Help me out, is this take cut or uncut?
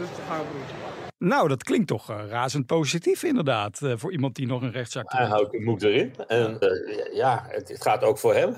cut